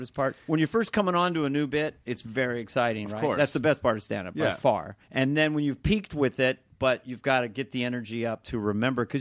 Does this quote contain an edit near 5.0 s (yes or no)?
yes